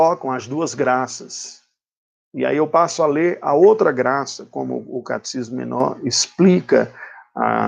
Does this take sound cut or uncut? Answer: uncut